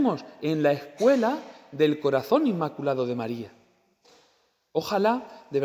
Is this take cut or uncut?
uncut